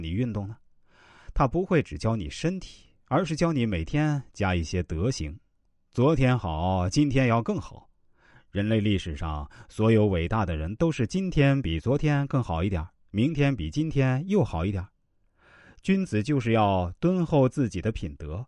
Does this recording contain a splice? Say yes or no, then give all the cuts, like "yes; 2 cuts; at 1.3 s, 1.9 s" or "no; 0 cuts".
no; 0 cuts